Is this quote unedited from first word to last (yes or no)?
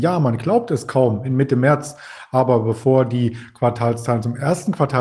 yes